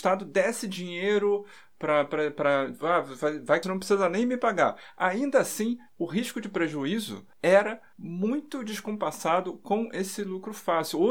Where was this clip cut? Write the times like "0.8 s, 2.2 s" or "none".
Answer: 3.6 s

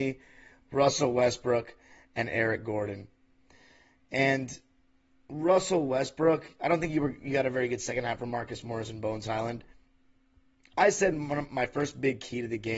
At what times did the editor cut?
none

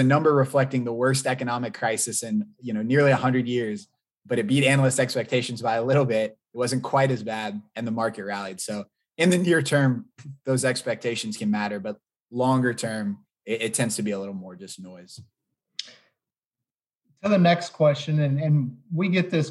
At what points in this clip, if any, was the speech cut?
none

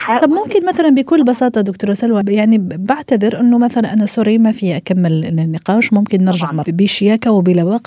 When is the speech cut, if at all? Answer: 2.2 s, 6.6 s

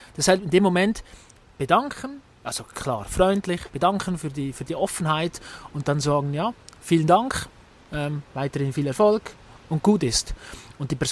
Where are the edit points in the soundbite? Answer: 3.7 s

